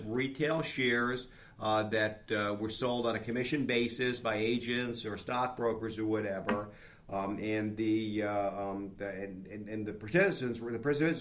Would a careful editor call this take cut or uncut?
uncut